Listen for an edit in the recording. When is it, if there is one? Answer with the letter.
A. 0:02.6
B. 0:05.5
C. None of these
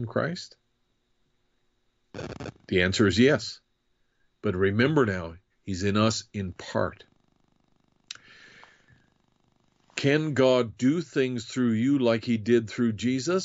B